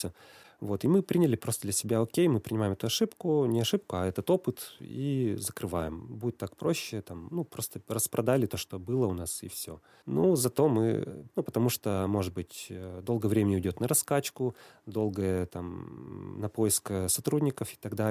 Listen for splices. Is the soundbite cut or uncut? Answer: cut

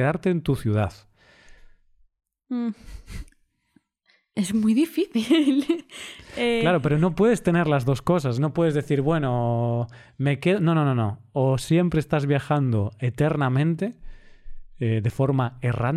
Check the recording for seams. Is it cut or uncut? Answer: uncut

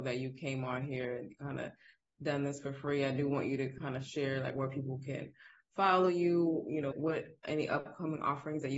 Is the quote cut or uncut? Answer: cut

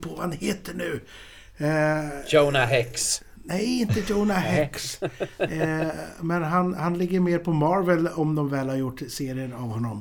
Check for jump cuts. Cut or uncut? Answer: uncut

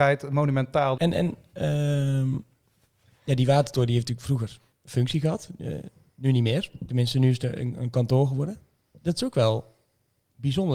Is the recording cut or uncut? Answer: cut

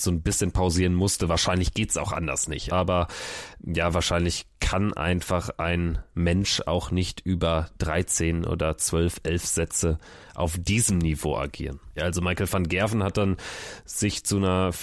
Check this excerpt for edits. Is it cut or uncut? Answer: cut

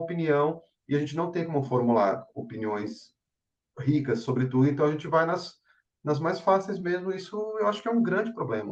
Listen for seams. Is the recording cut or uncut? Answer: uncut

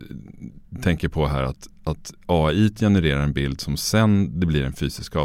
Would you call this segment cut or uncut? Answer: uncut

